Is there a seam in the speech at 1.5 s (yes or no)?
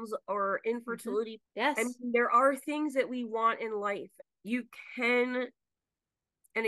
yes